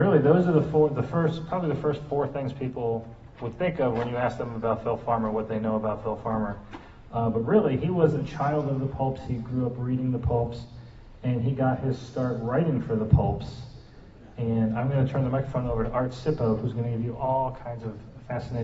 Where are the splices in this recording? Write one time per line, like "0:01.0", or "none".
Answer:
none